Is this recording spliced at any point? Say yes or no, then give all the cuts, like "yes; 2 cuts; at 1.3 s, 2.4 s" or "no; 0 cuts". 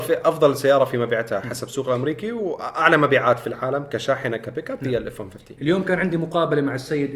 no; 0 cuts